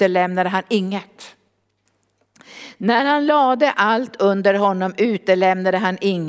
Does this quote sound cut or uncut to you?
uncut